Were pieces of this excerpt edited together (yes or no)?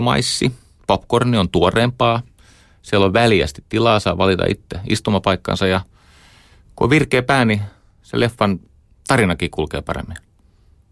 no